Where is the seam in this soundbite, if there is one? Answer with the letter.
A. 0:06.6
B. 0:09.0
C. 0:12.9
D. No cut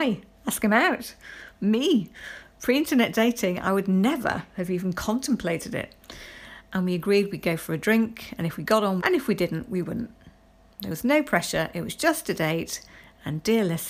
B